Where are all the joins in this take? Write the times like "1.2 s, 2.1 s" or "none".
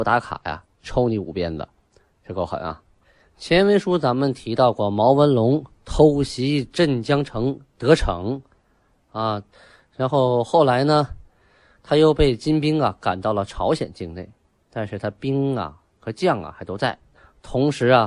none